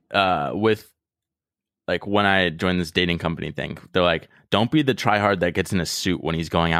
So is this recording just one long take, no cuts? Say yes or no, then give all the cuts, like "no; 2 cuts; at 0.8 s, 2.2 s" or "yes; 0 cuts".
yes; 0 cuts